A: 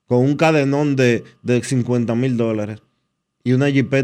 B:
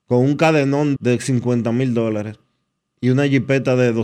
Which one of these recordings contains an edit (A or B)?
B